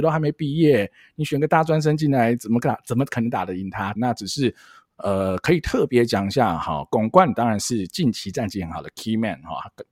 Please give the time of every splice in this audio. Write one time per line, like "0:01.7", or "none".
0:04.0

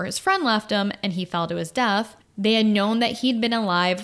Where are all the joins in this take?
0:02.2

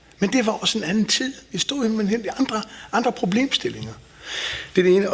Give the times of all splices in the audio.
none

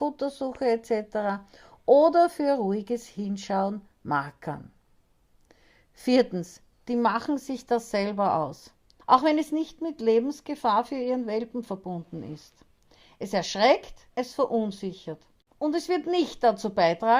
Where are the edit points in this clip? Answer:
0:09.0
0:14.1

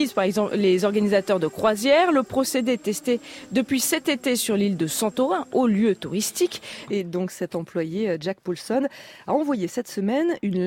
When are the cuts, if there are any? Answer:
0:06.9

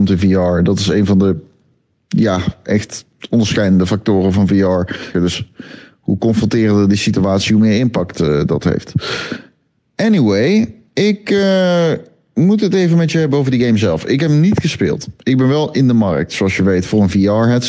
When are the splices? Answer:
0:05.1

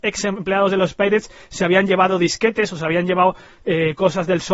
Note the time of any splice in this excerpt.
none

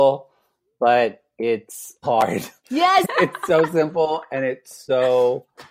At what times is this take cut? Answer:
0:02.0
0:03.0

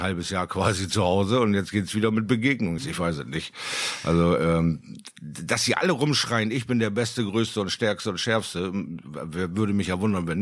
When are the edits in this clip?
0:02.8

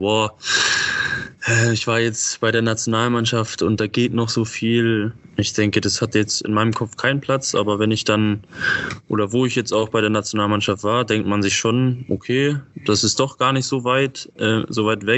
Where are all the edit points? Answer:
none

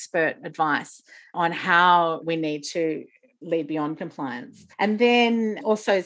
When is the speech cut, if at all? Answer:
0:04.7

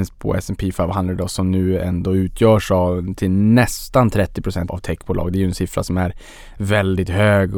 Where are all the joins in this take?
0:04.7

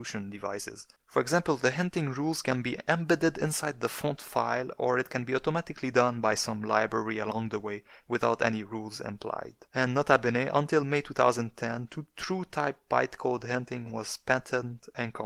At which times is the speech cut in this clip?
0:01.0

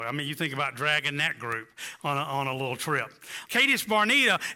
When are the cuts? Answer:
0:03.5

